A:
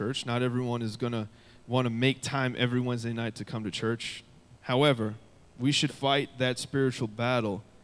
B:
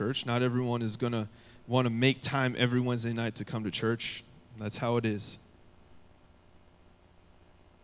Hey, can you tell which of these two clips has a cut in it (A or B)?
A